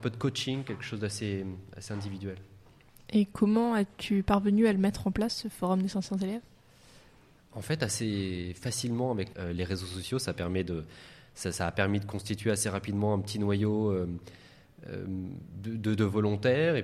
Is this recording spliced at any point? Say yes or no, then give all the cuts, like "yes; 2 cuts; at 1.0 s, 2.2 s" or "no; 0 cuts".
yes; 1 cut; at 9.3 s